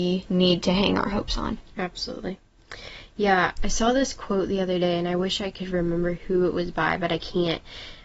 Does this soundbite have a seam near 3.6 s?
yes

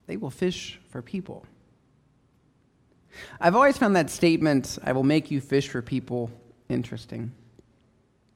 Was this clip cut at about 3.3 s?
no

